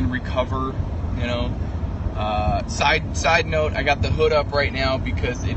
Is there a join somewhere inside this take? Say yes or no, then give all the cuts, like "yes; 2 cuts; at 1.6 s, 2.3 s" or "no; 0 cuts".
no; 0 cuts